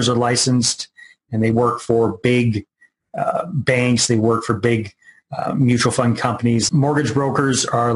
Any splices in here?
yes; 1 cut; at 6.7 s

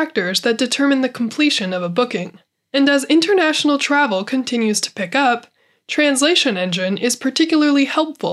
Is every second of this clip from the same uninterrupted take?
no; 1 cut; at 2.6 s

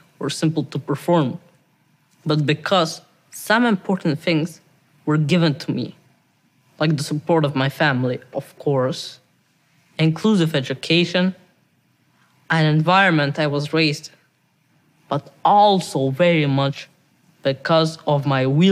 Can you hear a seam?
no; 0 cuts

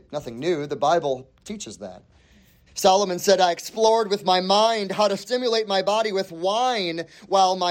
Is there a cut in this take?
yes; 1 cut; at 2.7 s

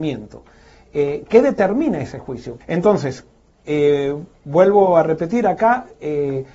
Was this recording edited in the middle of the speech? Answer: yes; 1 cut; at 2.6 s

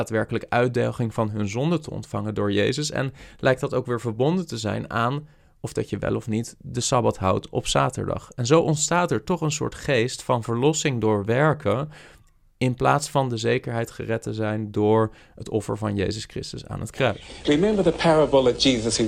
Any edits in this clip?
no; 0 cuts

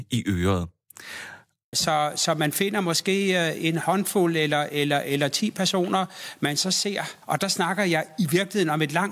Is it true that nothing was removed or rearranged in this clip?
no; 2 cuts; at 1.7 s, 7.2 s

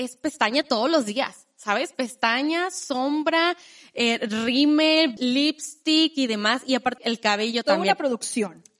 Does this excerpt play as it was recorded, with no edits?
no; 2 cuts; at 5.2 s, 7.0 s

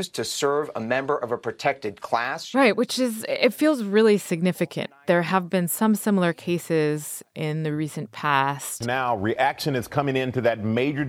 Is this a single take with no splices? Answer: yes; 0 cuts

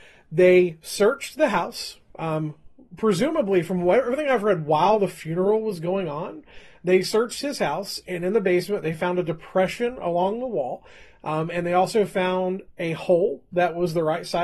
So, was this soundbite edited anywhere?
no; 0 cuts

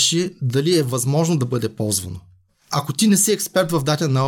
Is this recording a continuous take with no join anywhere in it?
yes; 0 cuts

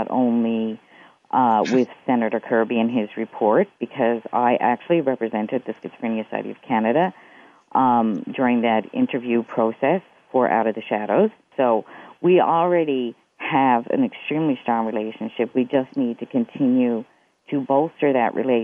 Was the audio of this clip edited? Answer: yes; 1 cut; at 11.5 s

